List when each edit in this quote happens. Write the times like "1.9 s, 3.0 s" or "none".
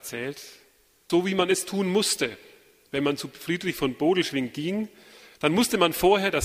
1.1 s